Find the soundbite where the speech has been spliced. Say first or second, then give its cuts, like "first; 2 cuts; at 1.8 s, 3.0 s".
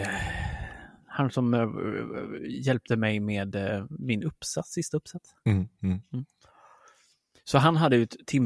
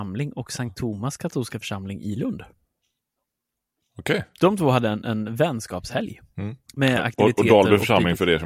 second; 1 cut; at 6.6 s